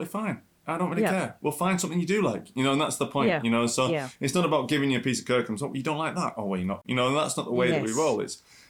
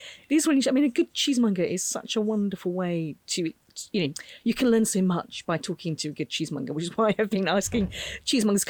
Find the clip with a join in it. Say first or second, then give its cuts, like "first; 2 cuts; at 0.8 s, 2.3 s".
first; 1 cut; at 6.8 s